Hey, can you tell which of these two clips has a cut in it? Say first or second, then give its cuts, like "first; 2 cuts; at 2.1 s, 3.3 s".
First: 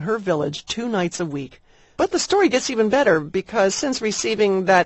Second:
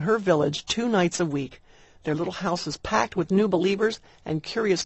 first; 1 cut; at 1.9 s